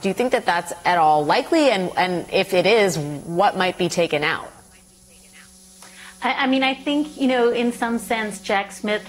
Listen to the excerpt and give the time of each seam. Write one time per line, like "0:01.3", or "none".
none